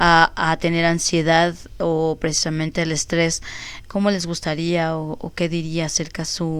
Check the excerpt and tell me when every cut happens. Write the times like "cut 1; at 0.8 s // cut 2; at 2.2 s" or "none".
cut 1; at 3.8 s